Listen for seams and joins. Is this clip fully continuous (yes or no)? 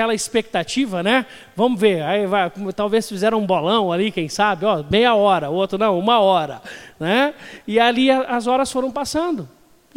yes